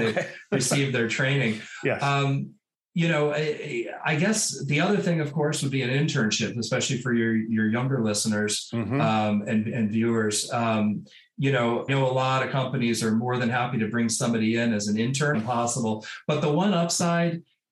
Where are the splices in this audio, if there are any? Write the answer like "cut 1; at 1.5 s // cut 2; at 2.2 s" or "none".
cut 1; at 11.9 s // cut 2; at 15.3 s